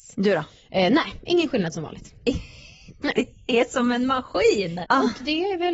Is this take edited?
yes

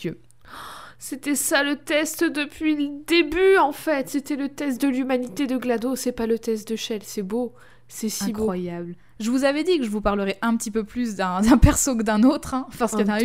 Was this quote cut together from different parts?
no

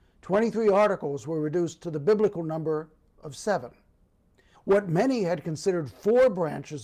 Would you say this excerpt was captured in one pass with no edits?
no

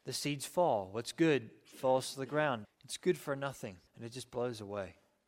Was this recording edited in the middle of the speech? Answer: yes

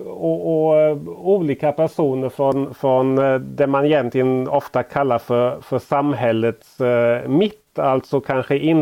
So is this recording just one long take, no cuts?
yes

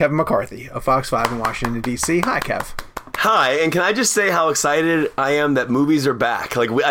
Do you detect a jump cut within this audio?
no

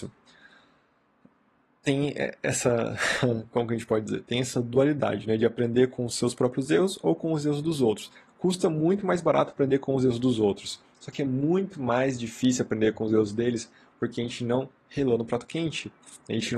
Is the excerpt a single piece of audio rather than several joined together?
yes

